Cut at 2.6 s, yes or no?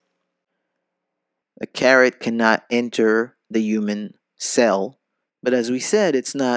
no